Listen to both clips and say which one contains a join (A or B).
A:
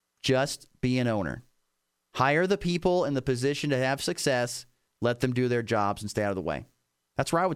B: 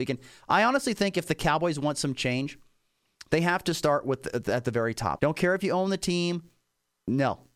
B